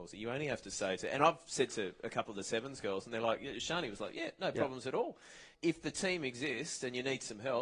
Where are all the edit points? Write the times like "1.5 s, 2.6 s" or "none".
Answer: 5.5 s

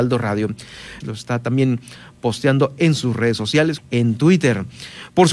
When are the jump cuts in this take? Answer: 1.0 s, 3.8 s

